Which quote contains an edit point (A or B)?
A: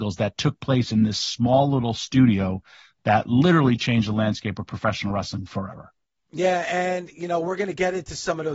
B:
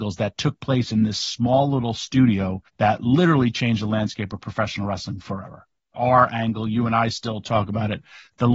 B